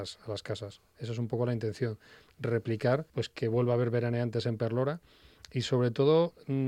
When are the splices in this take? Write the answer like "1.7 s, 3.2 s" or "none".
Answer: 3.1 s

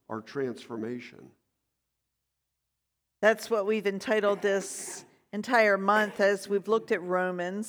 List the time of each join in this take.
none

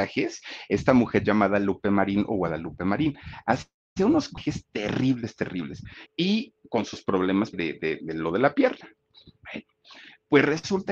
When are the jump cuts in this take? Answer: 6.1 s, 7.5 s

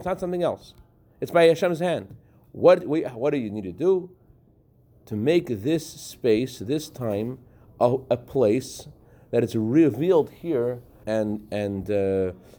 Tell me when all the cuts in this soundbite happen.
11.0 s

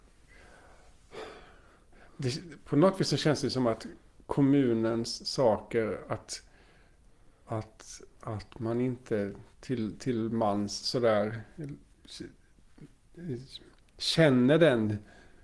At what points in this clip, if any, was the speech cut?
none

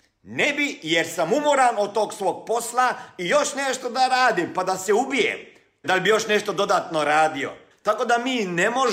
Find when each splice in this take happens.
5.8 s, 7.7 s

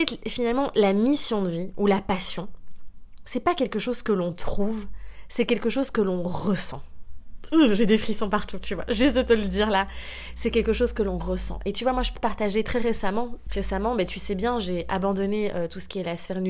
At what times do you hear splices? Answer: 12.2 s, 13.5 s

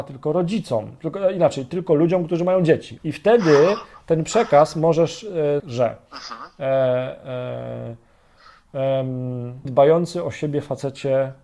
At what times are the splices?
3.0 s, 5.6 s, 9.7 s

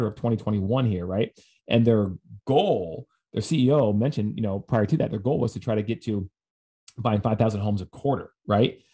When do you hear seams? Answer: none

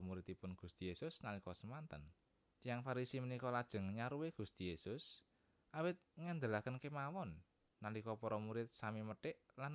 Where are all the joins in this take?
2.5 s

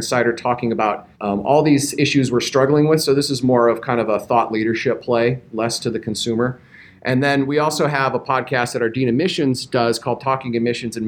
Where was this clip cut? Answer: 1.1 s

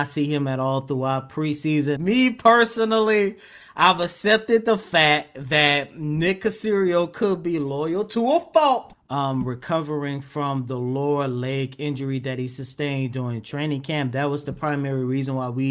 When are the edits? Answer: 2.0 s, 8.9 s

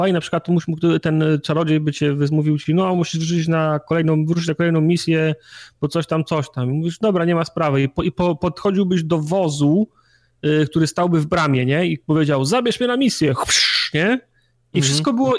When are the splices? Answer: none

